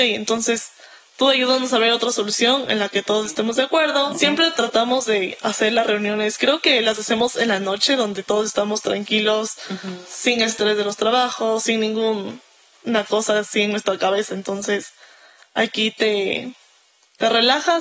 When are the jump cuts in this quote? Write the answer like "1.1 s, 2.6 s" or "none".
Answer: 4.1 s